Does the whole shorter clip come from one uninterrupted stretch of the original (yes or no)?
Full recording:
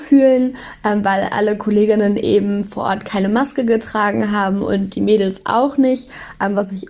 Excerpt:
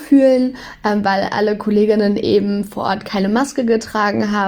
yes